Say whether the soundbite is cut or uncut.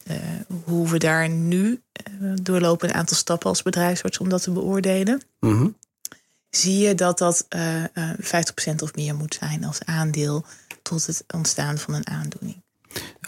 uncut